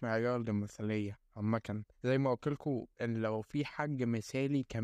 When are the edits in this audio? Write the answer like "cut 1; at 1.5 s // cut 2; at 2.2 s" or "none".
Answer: cut 1; at 1.9 s